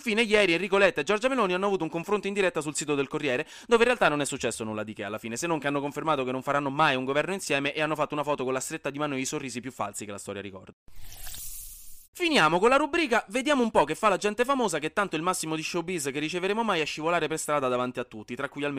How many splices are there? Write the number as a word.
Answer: one